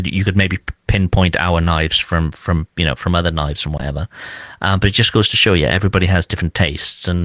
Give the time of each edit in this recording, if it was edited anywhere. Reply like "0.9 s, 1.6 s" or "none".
none